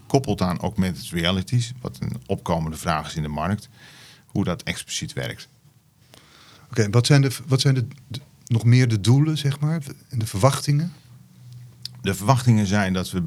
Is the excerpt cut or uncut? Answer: uncut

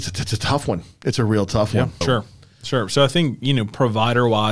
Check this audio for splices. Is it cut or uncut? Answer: cut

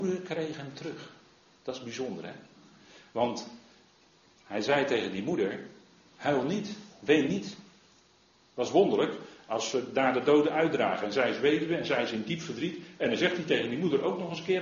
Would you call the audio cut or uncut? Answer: uncut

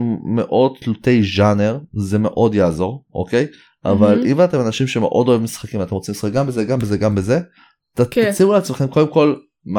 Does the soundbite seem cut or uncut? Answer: uncut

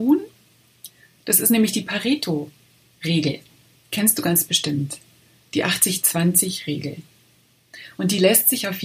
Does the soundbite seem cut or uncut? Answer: uncut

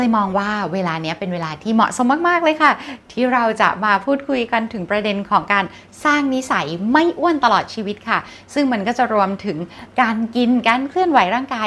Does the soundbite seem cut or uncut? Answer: uncut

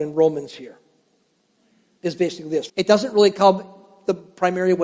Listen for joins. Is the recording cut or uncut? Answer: cut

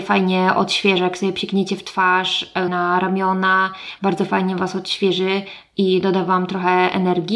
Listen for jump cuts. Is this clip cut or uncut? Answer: cut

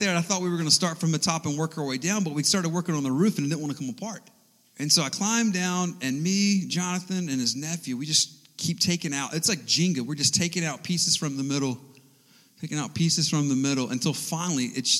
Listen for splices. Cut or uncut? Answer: cut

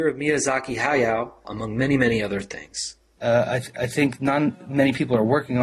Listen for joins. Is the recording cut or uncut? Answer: cut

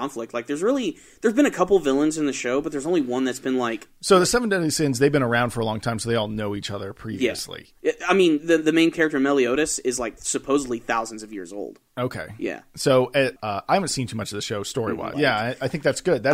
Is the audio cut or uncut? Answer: cut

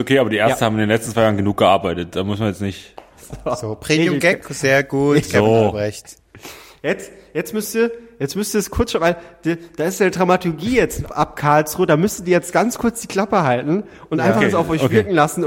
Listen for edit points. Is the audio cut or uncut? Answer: cut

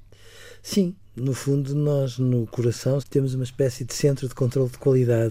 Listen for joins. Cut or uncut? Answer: cut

